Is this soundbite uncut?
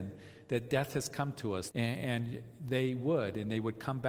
no; 1 cut; at 1.7 s

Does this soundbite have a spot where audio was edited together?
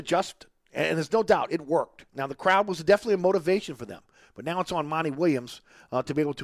no; 0 cuts

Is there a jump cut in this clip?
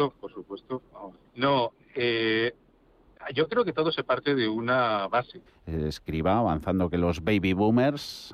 yes; 2 cuts; at 1.2 s, 5.5 s

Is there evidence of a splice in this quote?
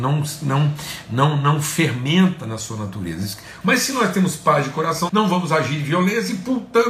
yes; 2 cuts; at 3.6 s, 5.1 s

